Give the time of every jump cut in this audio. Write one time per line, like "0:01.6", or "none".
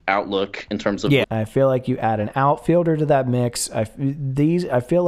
0:01.2